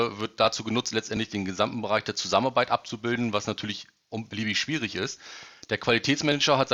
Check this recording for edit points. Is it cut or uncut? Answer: uncut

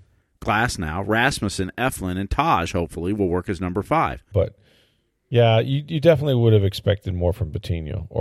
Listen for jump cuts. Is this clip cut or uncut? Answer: cut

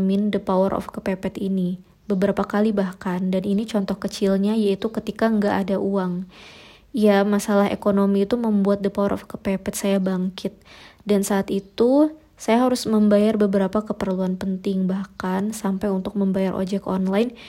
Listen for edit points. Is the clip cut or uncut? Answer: uncut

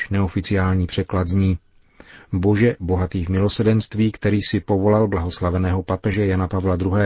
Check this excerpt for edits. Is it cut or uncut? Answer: uncut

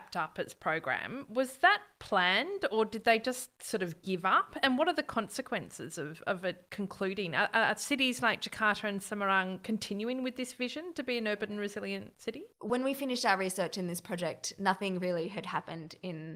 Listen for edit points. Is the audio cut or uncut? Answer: cut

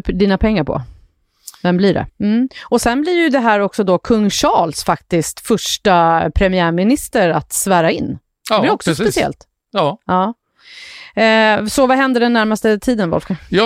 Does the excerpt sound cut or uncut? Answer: cut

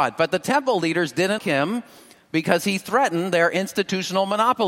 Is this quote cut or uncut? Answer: cut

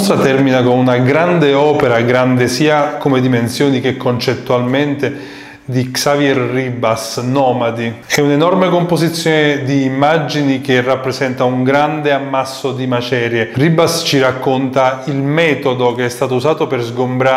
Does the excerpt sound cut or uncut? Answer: uncut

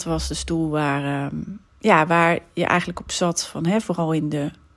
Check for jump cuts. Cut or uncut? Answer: cut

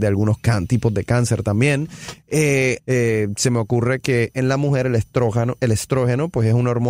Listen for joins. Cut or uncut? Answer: cut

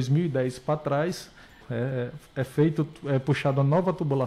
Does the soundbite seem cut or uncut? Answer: cut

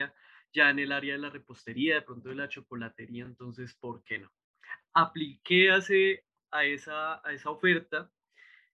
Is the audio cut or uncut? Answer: uncut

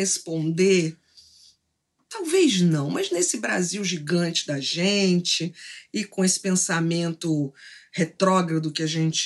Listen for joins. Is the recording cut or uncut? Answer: uncut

